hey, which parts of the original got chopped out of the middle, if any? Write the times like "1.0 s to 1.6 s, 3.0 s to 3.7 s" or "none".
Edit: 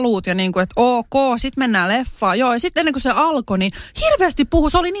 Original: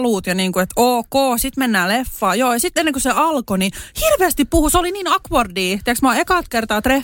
none